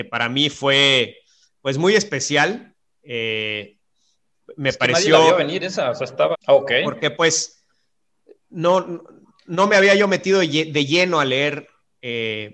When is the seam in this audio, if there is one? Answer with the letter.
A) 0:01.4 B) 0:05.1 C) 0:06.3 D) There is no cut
C